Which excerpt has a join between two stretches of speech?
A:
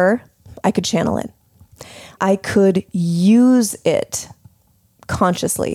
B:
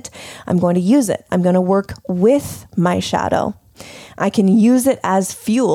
A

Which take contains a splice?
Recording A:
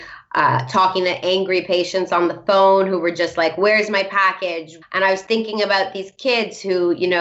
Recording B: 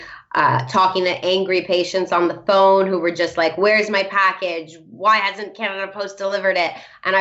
A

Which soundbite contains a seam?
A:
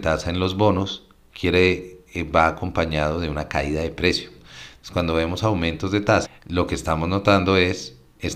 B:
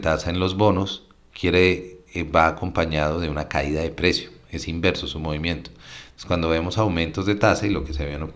A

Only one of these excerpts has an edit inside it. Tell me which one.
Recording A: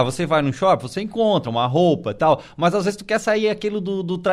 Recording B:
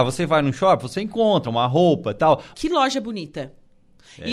B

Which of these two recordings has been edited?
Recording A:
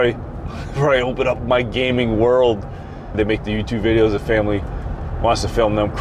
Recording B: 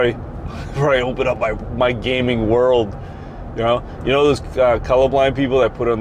A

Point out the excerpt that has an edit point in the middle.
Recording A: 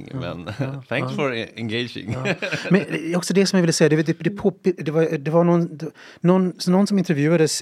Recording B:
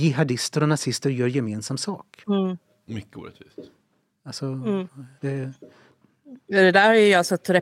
B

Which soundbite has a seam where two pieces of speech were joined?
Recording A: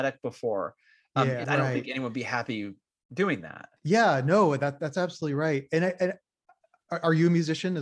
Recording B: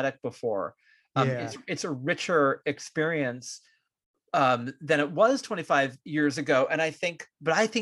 A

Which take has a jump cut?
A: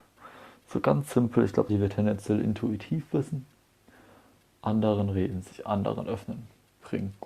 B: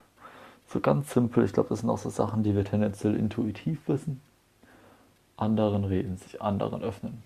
A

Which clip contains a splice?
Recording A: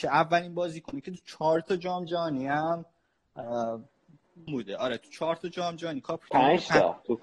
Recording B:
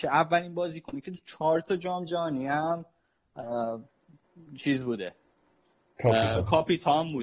A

